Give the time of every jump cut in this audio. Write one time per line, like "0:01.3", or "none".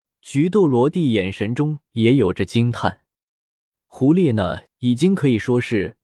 0:04.7